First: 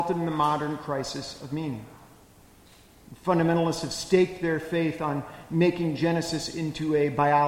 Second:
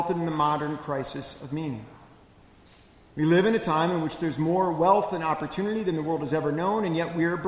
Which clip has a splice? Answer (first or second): first